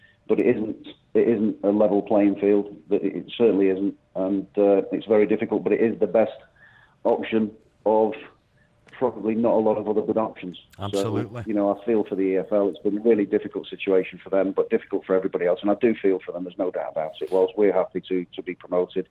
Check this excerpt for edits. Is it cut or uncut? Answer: uncut